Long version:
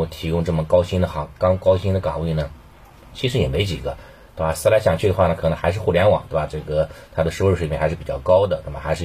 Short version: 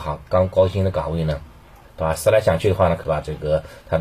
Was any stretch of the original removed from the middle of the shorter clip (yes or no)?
yes